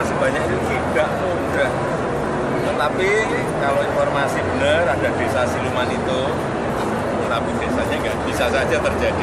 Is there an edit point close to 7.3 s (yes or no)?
yes